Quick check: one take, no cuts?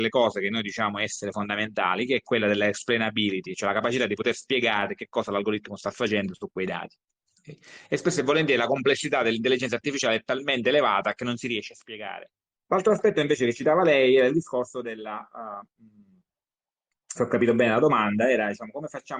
no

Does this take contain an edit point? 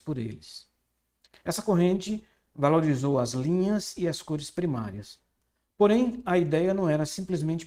yes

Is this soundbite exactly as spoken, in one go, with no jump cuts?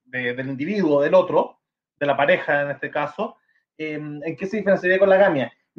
yes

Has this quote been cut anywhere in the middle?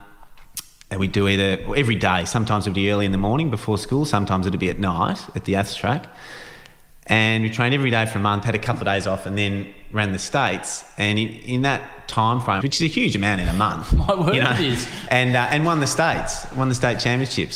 yes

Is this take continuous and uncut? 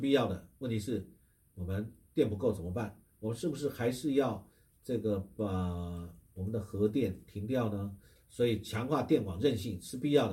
no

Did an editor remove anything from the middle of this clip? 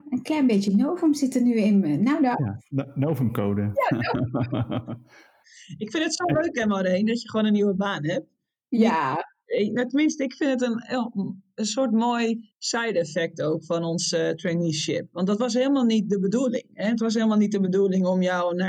no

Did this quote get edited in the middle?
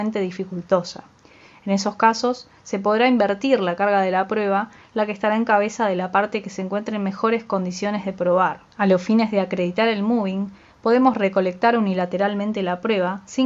yes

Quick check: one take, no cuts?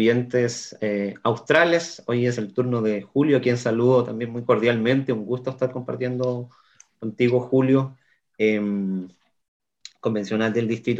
yes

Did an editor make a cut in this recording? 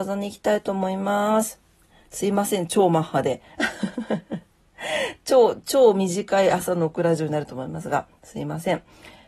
no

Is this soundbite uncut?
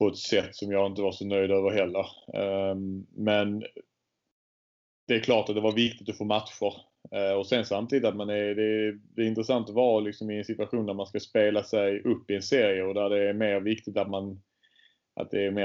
yes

